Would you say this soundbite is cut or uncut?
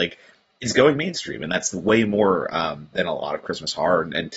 uncut